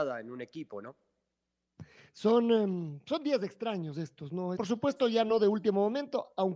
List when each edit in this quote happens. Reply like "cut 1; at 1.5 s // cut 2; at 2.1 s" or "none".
cut 1; at 4.6 s